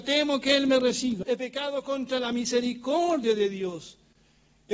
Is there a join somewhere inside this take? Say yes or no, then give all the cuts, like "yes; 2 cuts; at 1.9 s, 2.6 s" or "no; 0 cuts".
yes; 1 cut; at 1.2 s